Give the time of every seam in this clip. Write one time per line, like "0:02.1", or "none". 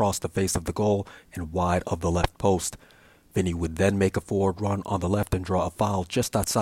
none